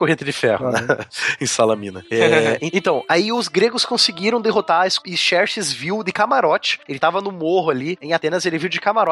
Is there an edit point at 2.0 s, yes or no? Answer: no